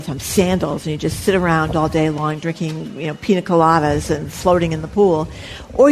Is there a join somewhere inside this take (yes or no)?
no